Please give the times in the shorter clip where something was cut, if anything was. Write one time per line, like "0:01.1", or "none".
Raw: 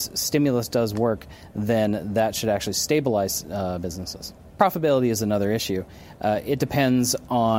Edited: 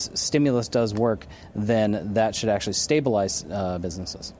none

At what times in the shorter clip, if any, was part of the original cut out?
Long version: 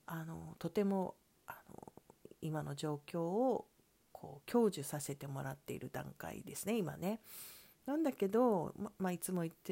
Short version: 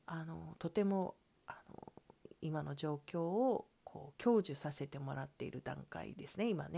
0:03.7

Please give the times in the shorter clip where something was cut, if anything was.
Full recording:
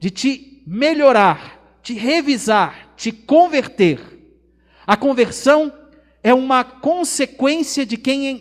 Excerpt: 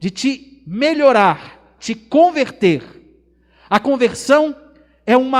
0:01.8

